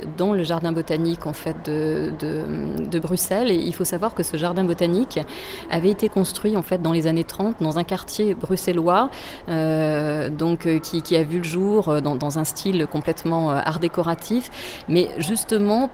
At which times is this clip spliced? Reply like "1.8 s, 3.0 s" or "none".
none